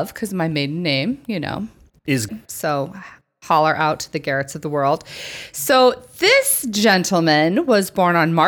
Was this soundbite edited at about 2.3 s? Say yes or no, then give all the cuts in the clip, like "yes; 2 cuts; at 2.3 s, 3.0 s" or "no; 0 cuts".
yes; 1 cut; at 2.3 s